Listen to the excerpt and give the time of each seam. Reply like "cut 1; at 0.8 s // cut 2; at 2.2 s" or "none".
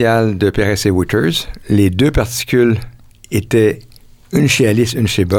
none